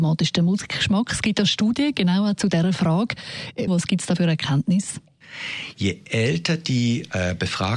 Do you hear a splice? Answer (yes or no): yes